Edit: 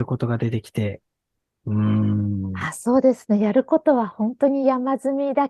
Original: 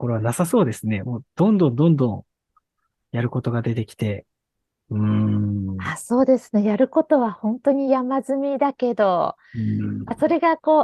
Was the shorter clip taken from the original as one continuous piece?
yes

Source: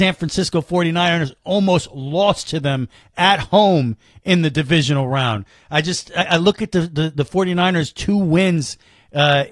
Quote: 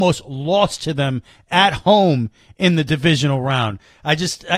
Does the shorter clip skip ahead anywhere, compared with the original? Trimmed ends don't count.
no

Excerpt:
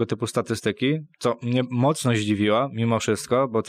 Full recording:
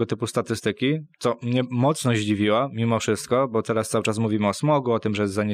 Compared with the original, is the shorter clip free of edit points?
yes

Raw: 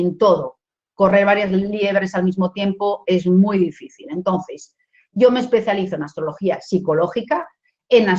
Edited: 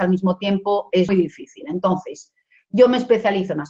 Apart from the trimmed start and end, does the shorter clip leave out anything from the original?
yes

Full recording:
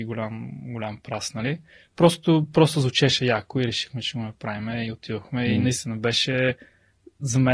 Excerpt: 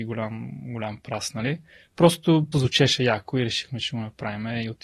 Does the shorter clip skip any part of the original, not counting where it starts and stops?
yes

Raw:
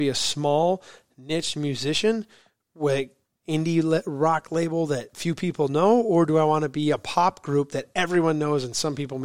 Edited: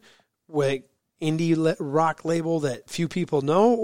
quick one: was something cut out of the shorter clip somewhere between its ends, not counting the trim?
no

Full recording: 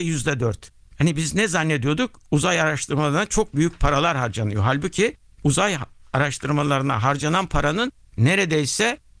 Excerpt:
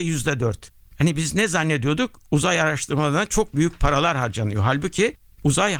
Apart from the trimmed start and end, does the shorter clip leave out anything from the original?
no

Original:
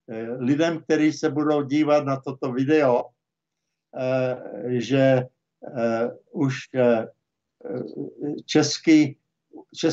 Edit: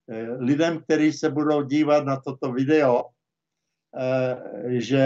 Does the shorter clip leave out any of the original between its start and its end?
no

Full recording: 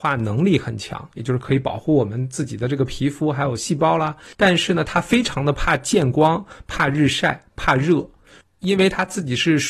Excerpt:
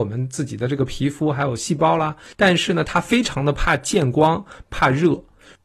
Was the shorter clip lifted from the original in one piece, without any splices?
no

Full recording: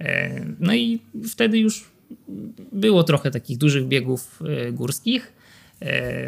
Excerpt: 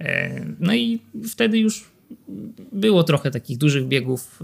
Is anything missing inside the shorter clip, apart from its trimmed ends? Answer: no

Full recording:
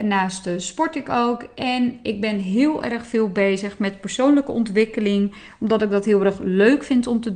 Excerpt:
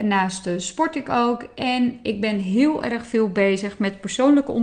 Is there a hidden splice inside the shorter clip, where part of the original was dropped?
no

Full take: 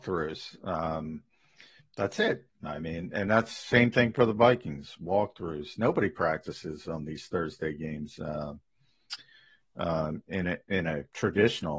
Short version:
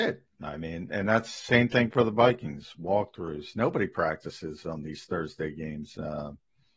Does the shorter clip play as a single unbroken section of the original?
yes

